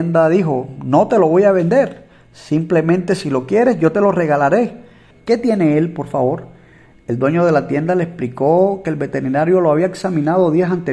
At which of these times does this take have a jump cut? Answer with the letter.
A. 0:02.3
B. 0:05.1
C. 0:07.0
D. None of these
B